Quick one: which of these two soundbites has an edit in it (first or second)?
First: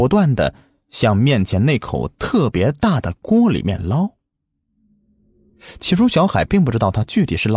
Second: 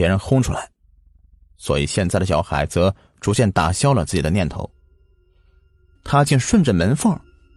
second